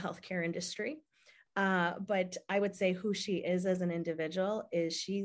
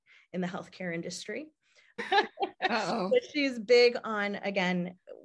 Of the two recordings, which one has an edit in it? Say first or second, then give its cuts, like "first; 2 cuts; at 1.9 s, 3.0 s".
second; 1 cut; at 2.0 s